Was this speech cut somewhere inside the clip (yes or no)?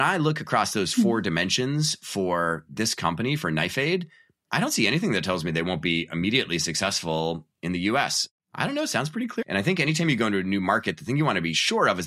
yes